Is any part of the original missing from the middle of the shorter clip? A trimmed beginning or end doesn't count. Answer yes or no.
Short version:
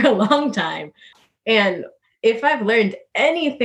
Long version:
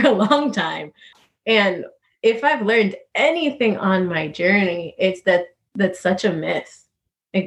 no